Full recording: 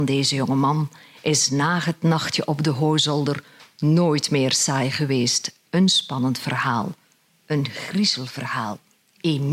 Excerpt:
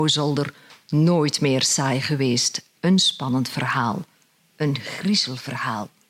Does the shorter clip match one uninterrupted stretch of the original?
yes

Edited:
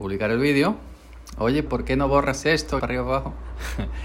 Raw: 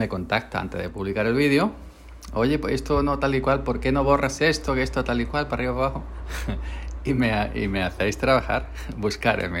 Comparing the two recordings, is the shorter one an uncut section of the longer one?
no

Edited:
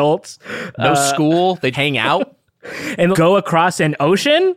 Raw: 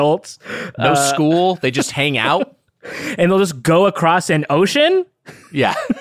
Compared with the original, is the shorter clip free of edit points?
no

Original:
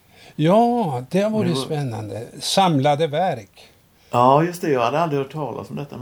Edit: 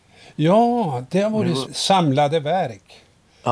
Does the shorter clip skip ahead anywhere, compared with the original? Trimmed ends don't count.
yes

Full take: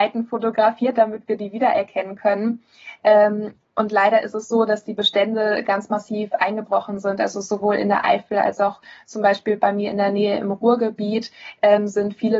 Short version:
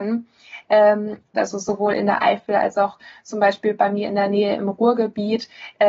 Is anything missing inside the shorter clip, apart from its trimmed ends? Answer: yes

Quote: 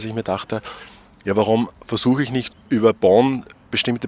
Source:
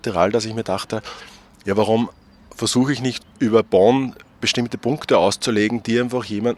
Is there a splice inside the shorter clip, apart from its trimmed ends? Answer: yes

